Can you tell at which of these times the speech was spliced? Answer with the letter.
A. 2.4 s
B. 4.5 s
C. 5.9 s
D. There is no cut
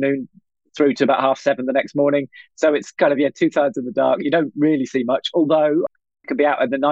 C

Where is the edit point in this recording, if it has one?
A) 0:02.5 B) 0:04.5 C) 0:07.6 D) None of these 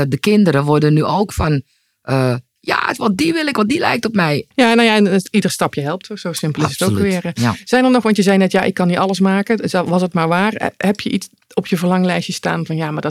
B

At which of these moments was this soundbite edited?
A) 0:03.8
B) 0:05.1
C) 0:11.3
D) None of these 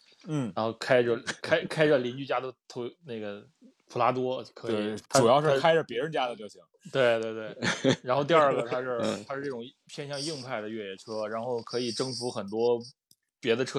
B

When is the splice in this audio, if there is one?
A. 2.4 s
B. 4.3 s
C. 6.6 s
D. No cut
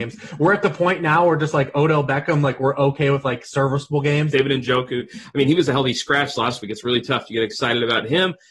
B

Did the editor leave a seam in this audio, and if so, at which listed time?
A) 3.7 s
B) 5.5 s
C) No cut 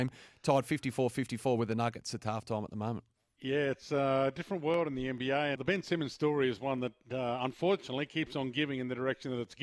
B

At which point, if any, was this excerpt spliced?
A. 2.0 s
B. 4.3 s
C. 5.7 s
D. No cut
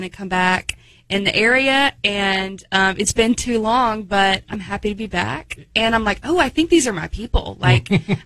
C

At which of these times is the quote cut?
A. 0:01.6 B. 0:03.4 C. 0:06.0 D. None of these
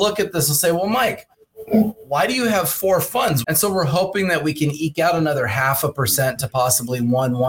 B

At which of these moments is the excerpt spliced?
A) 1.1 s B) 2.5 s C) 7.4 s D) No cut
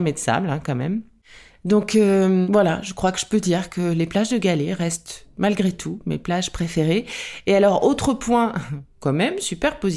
D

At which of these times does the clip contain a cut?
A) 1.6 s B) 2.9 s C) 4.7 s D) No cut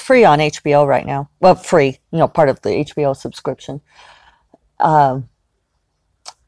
D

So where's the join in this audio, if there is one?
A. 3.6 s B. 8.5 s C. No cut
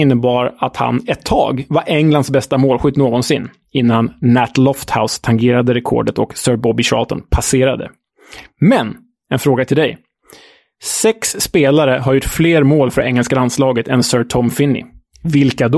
C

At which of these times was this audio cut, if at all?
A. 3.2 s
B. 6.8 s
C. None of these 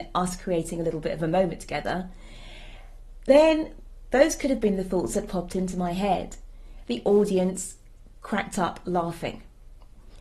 B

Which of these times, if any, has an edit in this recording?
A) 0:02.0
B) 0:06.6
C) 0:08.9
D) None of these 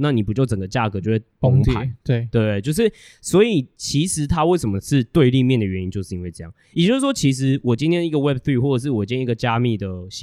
D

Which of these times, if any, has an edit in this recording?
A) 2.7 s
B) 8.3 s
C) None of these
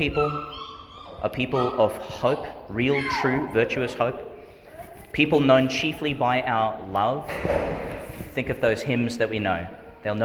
C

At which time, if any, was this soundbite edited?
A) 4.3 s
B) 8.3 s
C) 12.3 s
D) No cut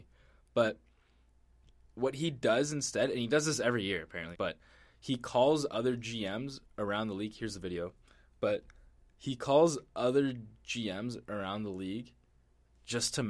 A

